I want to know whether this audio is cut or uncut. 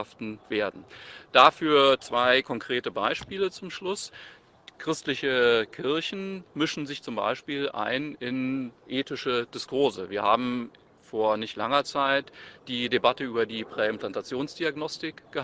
uncut